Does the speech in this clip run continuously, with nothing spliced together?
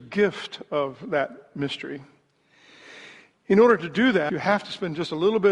no; 1 cut; at 4.3 s

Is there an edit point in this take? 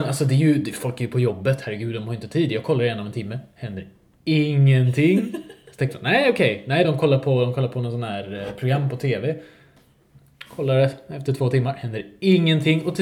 no; 0 cuts

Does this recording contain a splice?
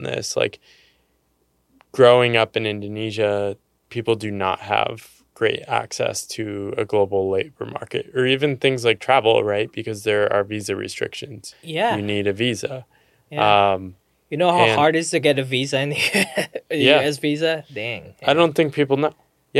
yes; 1 cut; at 11.5 s

